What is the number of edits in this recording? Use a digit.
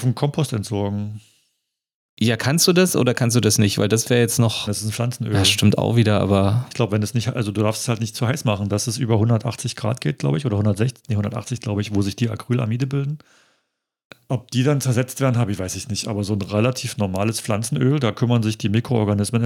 1